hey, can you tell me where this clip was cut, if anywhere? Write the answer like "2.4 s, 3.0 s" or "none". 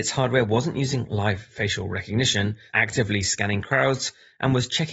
2.7 s